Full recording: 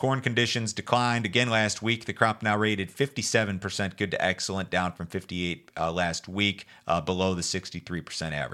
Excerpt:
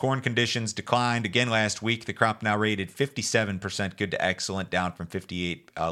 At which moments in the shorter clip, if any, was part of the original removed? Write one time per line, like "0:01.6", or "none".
none